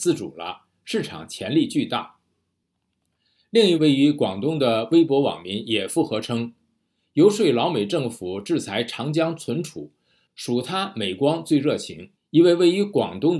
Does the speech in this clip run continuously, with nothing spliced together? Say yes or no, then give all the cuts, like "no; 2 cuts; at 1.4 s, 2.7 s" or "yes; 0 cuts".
no; 2 cuts; at 3.8 s, 12.1 s